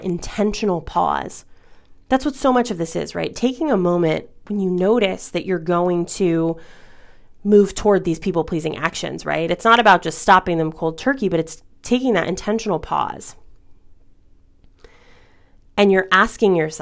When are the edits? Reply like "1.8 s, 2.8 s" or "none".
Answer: none